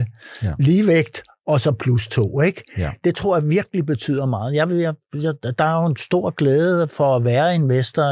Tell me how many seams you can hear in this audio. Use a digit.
0